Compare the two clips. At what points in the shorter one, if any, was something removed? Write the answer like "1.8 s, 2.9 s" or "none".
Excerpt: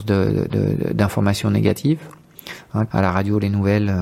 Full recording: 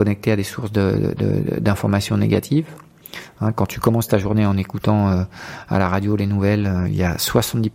2.9 s